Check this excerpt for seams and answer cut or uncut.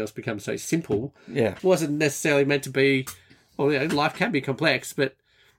cut